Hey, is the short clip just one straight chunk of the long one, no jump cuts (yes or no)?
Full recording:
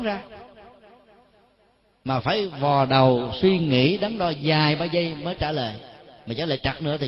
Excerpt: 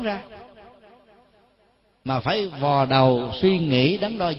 yes